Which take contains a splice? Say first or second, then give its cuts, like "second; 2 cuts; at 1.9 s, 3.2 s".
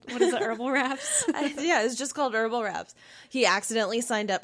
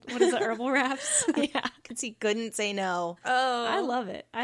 second; 2 cuts; at 1.3 s, 3.2 s